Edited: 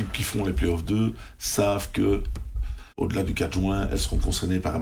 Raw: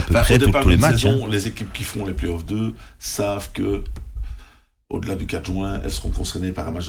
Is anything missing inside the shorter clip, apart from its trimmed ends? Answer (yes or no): yes